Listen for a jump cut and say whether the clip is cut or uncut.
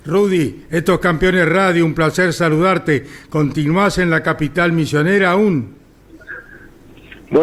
uncut